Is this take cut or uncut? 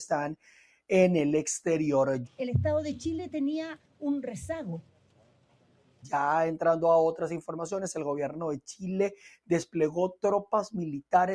cut